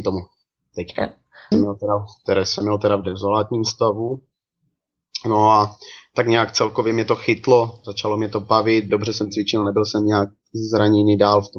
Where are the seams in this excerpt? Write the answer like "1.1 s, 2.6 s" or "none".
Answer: 1.5 s, 8.9 s